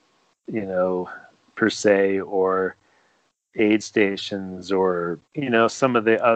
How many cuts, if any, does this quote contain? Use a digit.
1